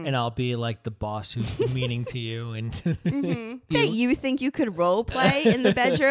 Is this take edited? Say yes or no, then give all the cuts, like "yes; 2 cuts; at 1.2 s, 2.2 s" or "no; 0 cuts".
yes; 1 cut; at 3.7 s